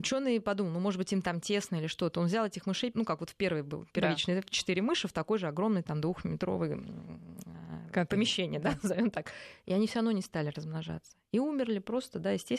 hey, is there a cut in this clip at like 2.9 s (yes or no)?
yes